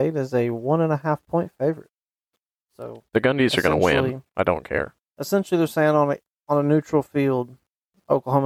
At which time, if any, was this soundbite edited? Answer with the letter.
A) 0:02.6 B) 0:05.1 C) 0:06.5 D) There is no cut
A